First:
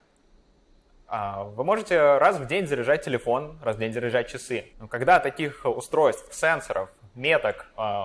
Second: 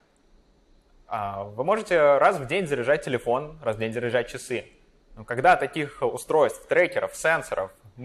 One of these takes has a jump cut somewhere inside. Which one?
first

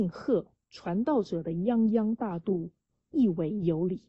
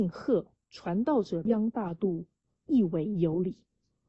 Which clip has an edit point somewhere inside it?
second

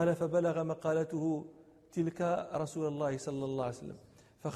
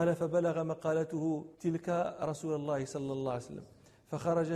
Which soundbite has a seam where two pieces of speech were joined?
second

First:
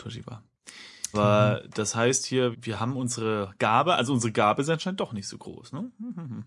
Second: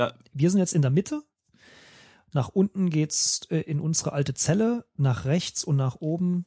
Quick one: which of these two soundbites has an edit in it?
first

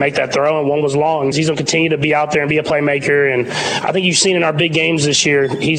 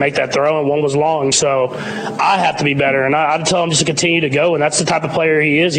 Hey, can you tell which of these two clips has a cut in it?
first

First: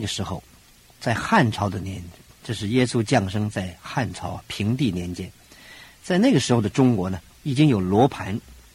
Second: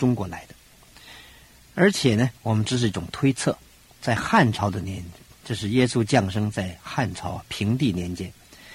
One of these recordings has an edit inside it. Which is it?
second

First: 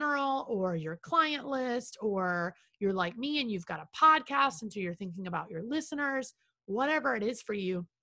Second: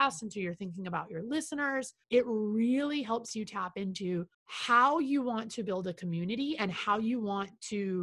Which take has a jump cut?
second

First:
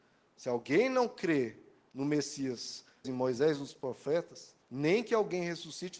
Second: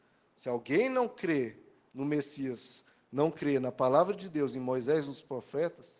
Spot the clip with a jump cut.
first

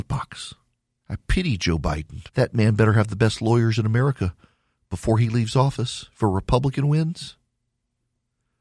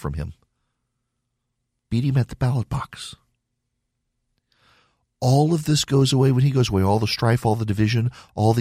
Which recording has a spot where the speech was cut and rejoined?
first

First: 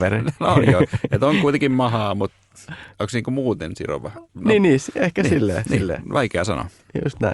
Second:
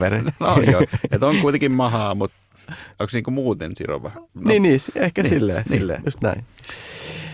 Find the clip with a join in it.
second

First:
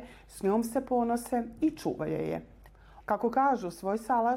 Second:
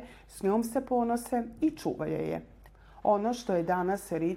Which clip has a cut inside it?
first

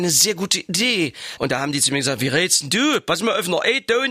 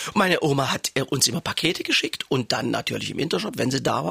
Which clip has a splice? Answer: first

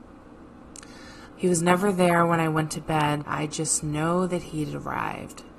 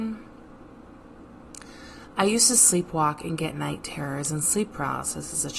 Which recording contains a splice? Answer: first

